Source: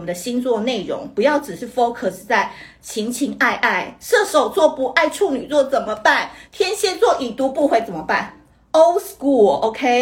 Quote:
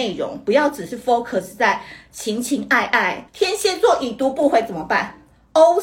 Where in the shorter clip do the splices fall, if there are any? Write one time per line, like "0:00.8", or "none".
0:03.3